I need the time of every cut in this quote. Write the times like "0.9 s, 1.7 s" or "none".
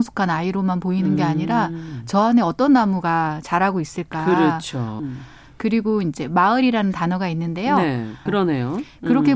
5.0 s, 8.3 s